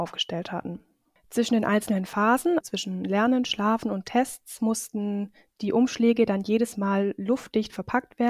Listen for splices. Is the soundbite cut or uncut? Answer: cut